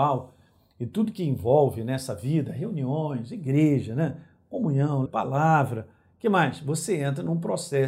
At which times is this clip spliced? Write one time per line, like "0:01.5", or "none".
0:05.1

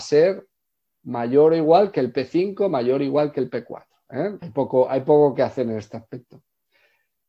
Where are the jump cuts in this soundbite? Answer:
0:04.4

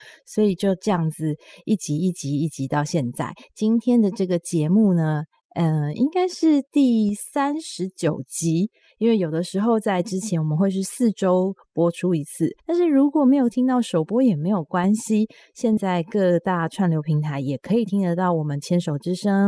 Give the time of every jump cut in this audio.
0:12.6
0:15.8

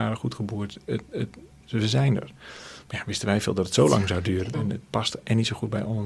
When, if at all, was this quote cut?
0:01.6
0:04.5

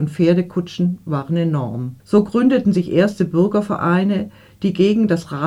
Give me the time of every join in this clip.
0:02.0

